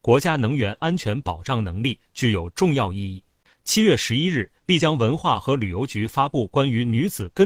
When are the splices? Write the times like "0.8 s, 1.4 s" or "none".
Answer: 3.5 s

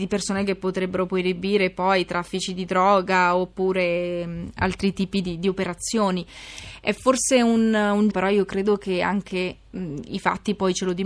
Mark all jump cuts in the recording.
8.1 s

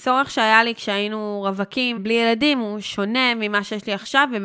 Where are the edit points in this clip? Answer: 2.0 s

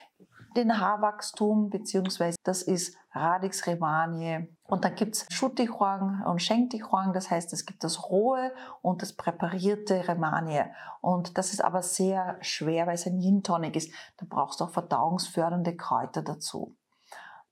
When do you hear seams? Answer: 2.4 s, 4.6 s

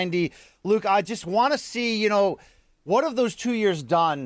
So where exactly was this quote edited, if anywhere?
none

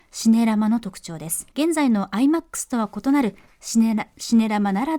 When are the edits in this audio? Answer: 1.5 s

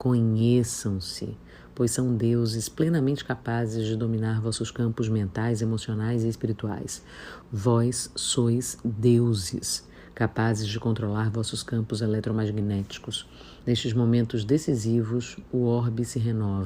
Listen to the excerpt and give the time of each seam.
7.4 s, 13.6 s

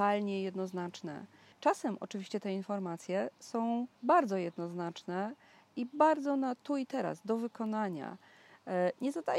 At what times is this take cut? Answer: 1.5 s, 3.9 s

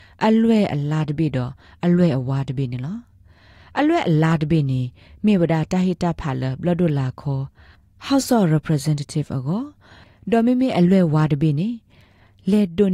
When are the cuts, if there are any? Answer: none

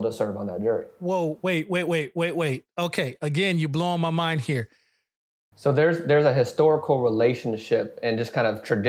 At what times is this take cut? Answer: 5.5 s

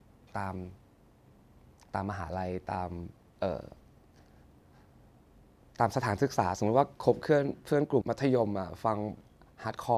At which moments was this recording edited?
8.0 s

